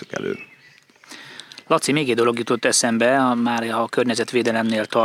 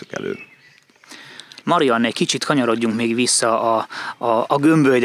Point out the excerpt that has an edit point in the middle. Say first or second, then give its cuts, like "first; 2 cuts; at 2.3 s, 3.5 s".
second; 1 cut; at 1.6 s